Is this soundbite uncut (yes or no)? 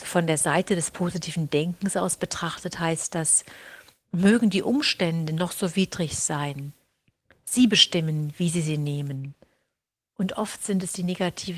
no